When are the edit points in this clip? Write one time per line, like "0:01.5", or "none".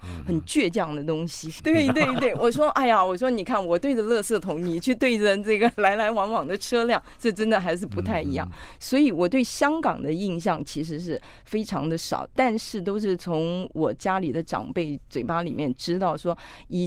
0:01.6